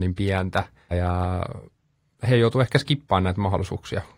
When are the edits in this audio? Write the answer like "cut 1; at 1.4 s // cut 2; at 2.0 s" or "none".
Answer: cut 1; at 0.9 s